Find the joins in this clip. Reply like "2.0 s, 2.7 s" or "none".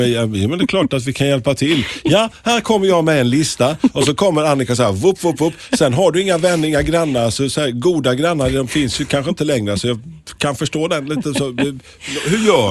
none